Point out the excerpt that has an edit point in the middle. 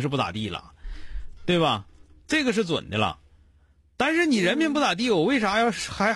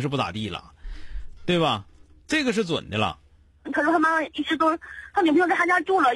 second; 1 cut; at 3.6 s

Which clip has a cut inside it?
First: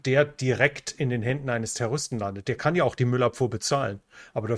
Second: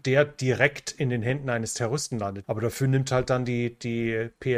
second; 1 cut; at 2.4 s

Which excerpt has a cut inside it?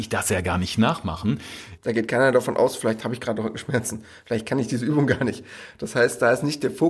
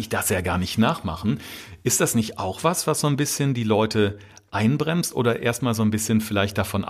first; 1 cut; at 1.8 s

